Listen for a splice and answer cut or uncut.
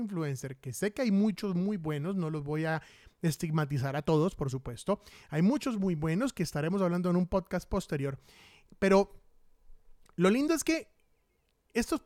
uncut